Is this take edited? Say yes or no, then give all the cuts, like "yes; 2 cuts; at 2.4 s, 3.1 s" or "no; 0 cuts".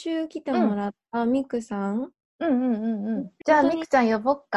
yes; 1 cut; at 3.4 s